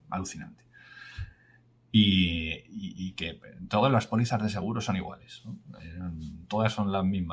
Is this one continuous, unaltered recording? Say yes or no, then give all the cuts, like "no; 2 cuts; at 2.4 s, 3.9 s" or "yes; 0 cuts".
yes; 0 cuts